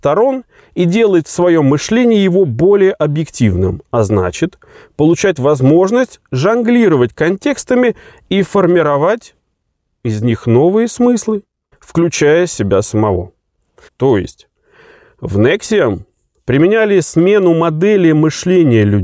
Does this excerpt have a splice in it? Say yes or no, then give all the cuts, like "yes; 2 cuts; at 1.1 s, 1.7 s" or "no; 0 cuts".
yes; 2 cuts; at 11.7 s, 13.9 s